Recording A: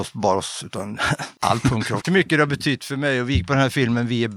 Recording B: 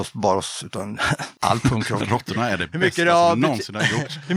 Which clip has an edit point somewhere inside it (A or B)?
A